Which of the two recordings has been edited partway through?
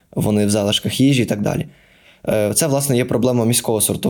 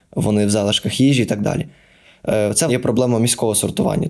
second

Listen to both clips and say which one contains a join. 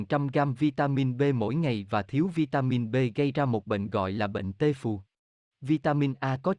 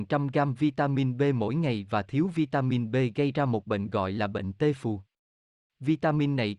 first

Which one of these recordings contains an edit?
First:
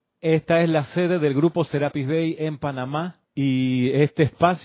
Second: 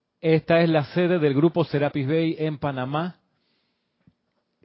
first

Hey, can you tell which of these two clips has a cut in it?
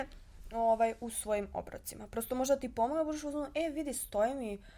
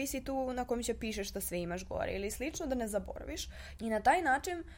second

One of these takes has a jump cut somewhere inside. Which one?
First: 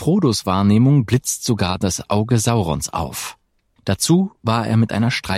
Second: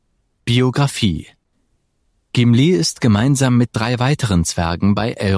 first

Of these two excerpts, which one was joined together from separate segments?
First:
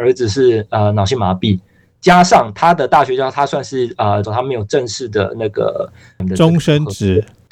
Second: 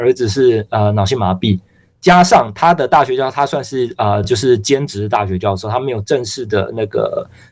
first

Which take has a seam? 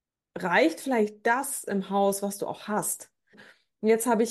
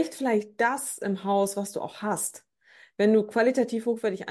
first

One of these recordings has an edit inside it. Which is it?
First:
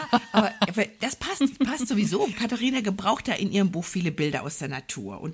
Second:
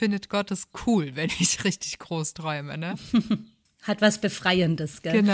first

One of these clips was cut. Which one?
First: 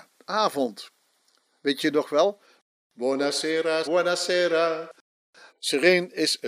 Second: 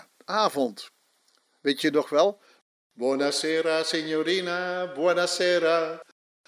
first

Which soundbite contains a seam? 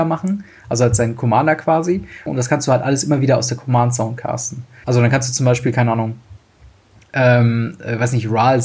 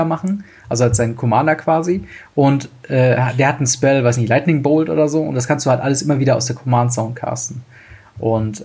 first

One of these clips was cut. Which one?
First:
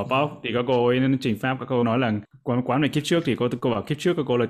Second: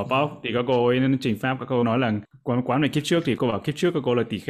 second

